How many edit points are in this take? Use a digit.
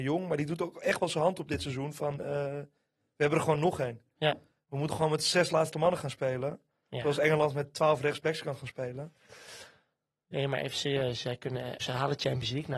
1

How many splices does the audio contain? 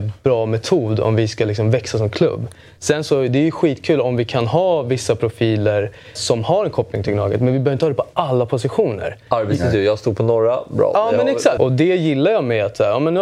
2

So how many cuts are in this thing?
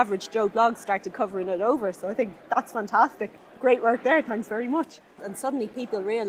1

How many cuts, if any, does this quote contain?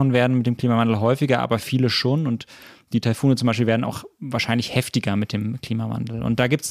0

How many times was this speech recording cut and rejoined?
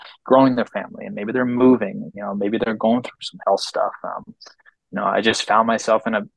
0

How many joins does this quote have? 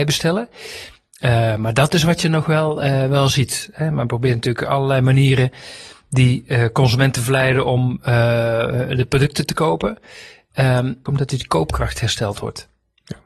1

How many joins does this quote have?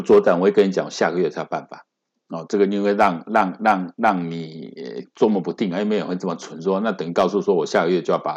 0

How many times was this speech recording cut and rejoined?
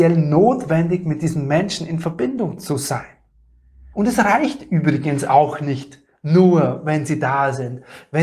1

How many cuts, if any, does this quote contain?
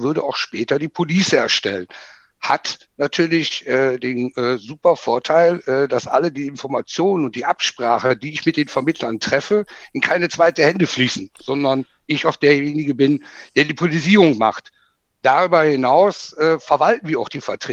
0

